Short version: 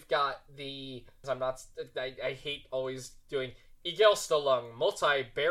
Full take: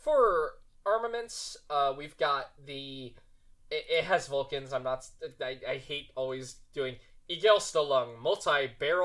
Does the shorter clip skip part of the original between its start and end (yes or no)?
yes